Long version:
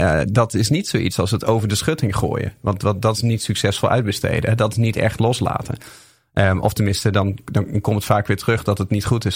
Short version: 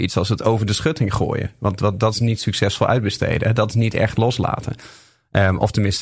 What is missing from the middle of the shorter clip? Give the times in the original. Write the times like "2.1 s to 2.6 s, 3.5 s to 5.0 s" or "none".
none